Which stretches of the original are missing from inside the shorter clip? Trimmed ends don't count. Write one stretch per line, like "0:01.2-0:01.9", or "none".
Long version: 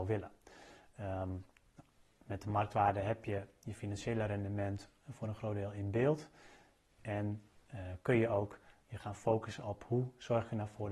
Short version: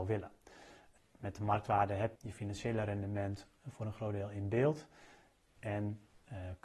0:01.0-0:02.0
0:03.2-0:03.6